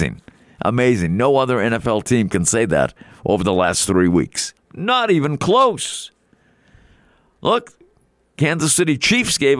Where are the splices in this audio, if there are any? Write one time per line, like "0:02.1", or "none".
0:04.6